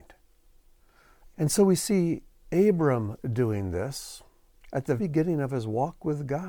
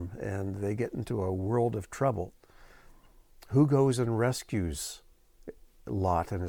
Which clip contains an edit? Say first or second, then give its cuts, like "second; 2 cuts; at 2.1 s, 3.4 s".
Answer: first; 2 cuts; at 1.3 s, 5.0 s